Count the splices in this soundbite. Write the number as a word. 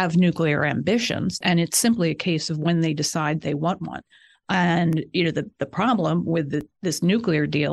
one